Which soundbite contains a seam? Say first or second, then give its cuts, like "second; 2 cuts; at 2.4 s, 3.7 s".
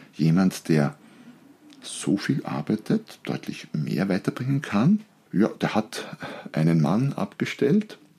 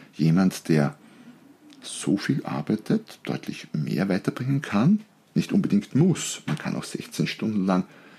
first; 1 cut; at 5.3 s